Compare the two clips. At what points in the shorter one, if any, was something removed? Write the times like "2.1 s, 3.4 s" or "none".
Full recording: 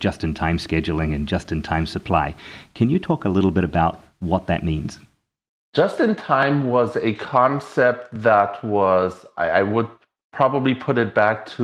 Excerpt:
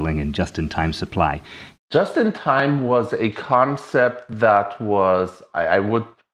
1.7 s